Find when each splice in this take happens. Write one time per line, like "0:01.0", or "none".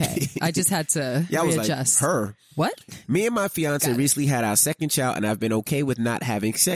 none